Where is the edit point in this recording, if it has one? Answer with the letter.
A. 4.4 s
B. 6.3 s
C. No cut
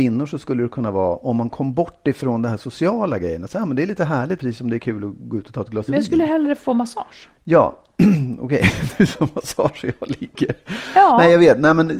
A